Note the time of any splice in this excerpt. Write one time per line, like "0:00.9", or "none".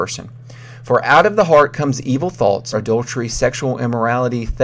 0:02.7